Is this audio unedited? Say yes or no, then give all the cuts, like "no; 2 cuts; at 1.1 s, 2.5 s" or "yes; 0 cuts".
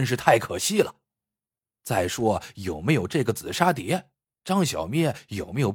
yes; 0 cuts